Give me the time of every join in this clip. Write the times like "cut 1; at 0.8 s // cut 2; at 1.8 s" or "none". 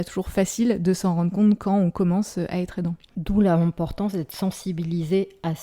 none